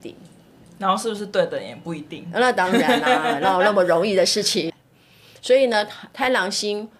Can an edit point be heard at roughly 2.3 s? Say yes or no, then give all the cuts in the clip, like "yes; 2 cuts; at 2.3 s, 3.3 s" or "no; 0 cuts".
no; 1 cut; at 4.7 s